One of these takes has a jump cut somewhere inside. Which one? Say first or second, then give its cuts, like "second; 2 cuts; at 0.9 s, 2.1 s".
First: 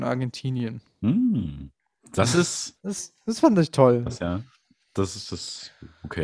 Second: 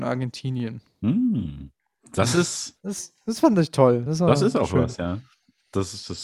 first; 1 cut; at 4.1 s